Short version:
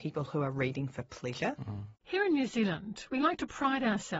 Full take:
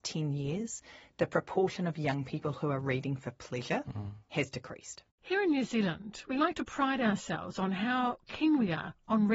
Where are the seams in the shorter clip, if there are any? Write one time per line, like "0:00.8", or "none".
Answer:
0:02.0

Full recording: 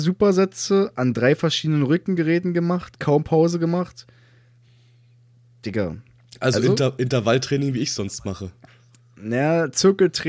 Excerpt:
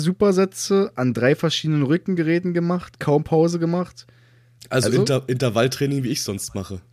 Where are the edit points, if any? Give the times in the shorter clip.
0:04.6

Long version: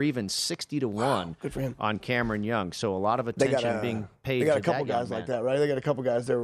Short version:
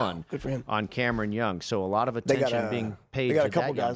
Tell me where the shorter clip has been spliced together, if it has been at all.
none

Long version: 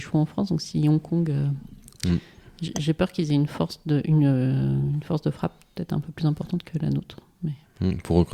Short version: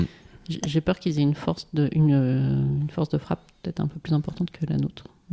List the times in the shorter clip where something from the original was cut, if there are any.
none

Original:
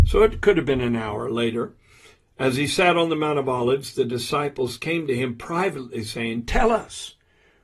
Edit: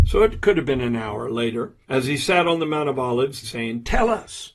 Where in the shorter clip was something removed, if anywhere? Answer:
0:01.8
0:03.4

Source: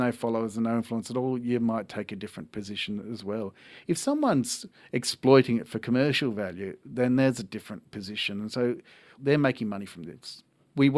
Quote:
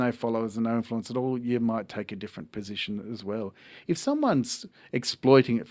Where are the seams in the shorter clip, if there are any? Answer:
none

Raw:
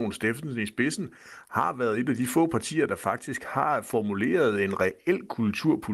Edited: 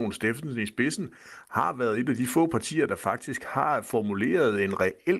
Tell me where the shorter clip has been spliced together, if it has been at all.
none

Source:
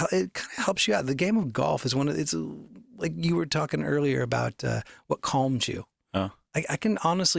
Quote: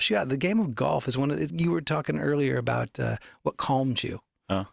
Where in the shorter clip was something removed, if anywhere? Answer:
0:01.5

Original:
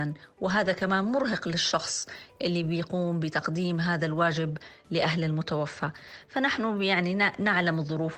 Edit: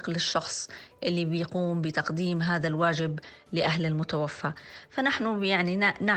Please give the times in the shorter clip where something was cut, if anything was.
none

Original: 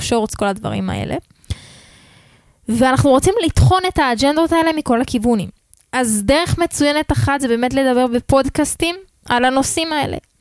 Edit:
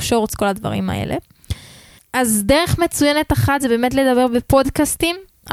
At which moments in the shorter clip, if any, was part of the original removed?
0:02.0

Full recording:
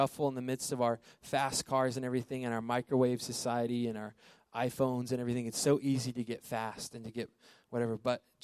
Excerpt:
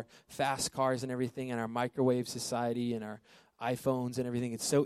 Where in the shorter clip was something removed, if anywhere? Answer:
none

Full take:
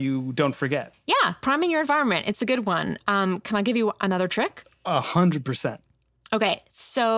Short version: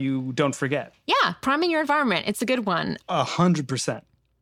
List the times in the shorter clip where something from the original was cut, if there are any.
0:03.0

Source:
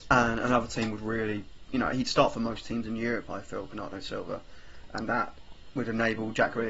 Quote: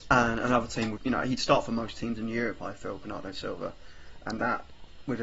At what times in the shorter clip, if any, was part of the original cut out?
0:01.0

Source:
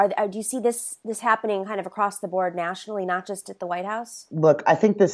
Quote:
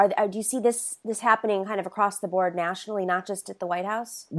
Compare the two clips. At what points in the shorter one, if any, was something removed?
none

